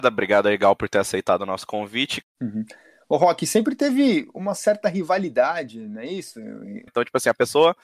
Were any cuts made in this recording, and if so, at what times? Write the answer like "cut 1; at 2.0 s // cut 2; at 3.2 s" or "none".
cut 1; at 2.2 s // cut 2; at 6.9 s